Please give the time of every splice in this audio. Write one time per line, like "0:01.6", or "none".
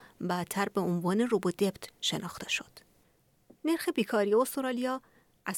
none